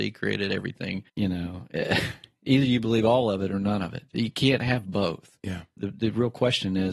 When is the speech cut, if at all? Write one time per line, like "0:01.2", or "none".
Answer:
0:01.1
0:05.8